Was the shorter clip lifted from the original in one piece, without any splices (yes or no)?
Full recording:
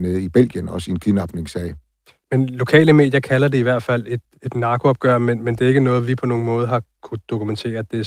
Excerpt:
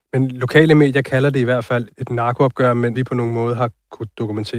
no